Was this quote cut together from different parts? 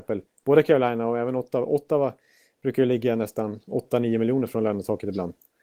no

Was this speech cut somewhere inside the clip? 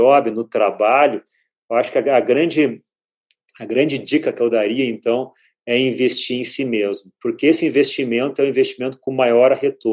no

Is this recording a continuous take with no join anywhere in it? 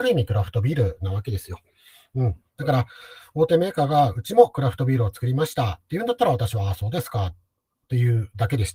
yes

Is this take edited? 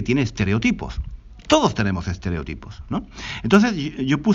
no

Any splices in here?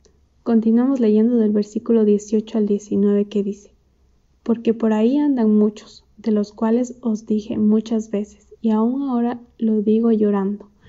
no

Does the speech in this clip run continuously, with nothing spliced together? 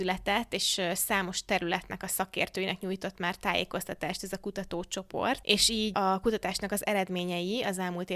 yes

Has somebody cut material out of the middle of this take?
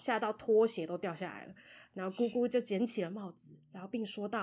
no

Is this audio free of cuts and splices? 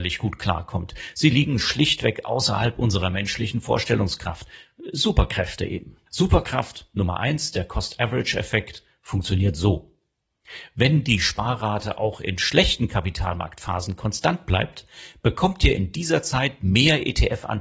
no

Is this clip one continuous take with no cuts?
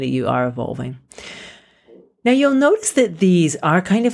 yes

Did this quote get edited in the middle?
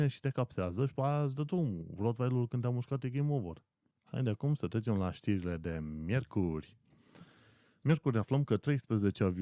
no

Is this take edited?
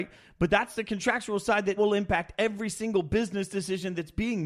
yes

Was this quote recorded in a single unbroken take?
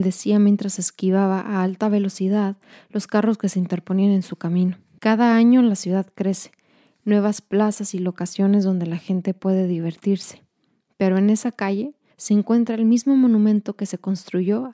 no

